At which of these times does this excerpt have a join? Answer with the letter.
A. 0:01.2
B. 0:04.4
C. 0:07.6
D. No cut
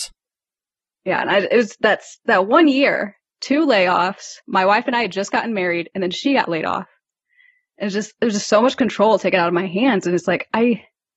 B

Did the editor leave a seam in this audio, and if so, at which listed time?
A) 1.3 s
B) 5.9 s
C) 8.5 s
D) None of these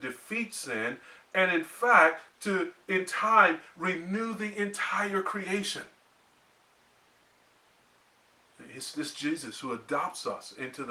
D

